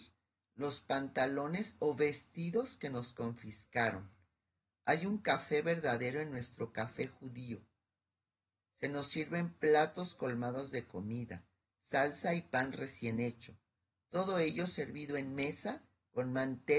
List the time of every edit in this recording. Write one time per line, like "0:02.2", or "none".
0:08.6